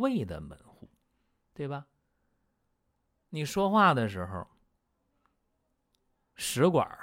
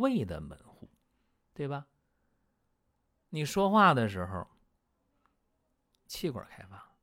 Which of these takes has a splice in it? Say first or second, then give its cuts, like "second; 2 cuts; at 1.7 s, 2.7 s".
second; 1 cut; at 6.1 s